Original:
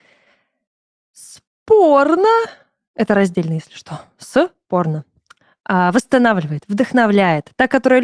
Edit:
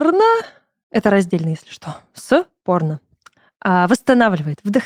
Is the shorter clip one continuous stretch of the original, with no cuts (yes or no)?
yes